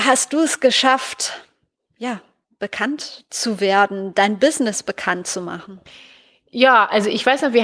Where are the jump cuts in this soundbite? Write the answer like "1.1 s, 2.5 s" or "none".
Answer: none

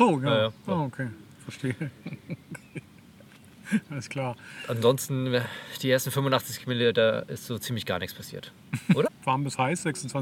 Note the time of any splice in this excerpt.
9.1 s

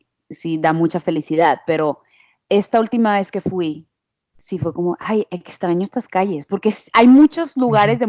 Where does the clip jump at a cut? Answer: none

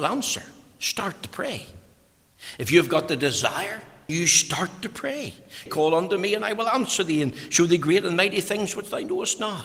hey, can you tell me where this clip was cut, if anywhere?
4.1 s, 5.7 s

